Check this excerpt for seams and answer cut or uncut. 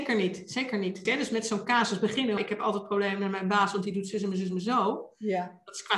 cut